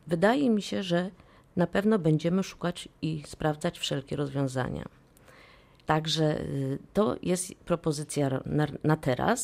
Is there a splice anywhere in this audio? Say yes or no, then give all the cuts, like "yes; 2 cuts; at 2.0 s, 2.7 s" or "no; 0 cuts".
yes; 1 cut; at 5.8 s